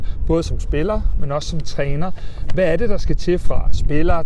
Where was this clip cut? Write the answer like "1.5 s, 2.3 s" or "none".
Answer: none